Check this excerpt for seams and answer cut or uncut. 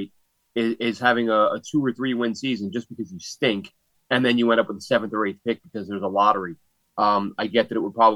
uncut